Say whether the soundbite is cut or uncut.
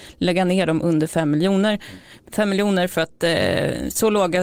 uncut